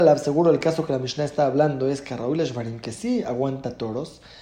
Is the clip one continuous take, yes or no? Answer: yes